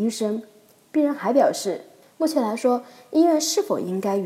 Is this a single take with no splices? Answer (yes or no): no